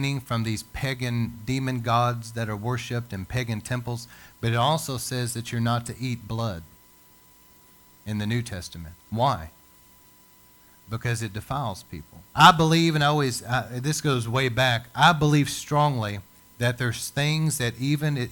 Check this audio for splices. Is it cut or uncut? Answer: cut